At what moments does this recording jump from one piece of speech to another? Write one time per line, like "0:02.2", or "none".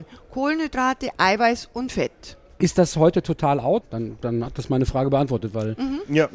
0:02.6
0:03.8

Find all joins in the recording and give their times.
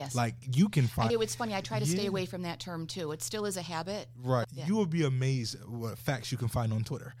0:01.1
0:04.4

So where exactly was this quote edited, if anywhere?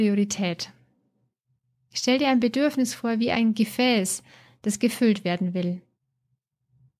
none

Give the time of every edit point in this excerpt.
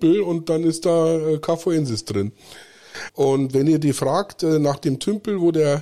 0:03.1

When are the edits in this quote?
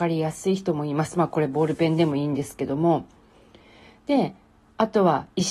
none

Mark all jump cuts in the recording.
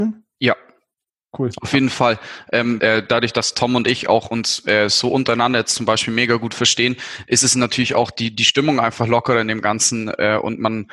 0:02.8

